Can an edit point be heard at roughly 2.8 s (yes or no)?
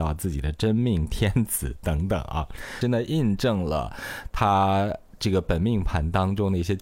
yes